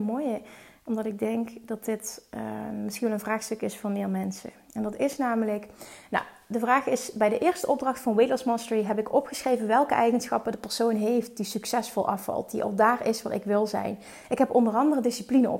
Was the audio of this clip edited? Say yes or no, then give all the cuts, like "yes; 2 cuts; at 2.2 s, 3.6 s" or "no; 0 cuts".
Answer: no; 0 cuts